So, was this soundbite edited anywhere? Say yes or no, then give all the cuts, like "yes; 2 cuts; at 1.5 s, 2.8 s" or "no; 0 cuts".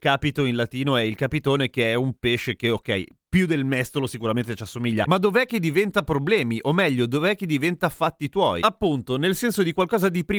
yes; 1 cut; at 5.1 s